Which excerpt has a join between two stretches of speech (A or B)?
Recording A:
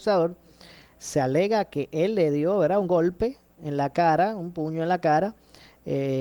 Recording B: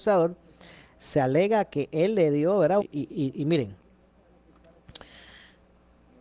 B